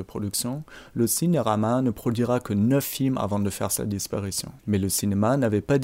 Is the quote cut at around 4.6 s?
yes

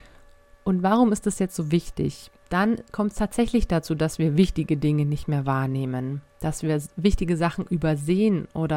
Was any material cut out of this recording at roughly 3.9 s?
no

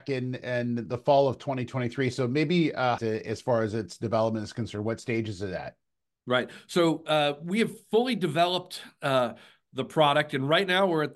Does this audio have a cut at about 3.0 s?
yes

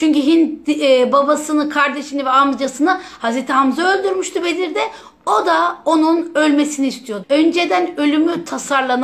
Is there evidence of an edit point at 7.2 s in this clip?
yes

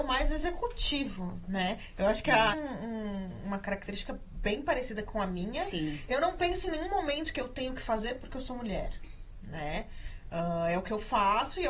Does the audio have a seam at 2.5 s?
yes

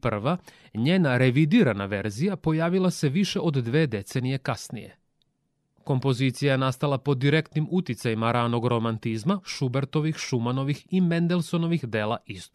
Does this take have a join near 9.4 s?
yes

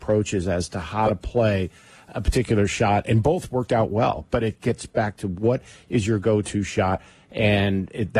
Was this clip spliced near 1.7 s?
no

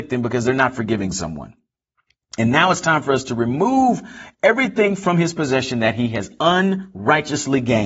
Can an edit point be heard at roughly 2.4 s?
no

